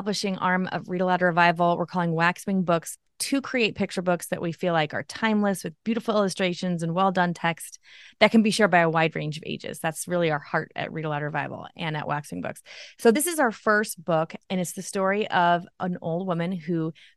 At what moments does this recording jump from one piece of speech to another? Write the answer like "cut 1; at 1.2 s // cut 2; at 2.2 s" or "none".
none